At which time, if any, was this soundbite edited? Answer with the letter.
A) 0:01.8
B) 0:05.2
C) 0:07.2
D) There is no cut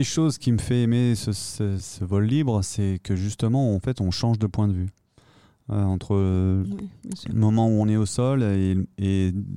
A